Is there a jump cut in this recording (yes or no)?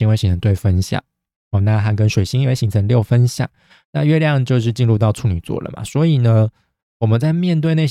no